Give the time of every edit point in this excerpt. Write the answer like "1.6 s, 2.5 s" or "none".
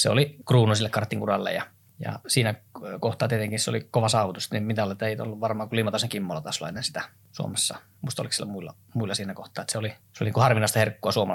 none